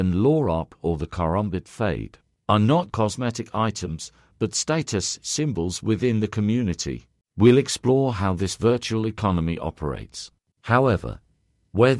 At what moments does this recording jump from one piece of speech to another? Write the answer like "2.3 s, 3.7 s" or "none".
2.9 s, 10.5 s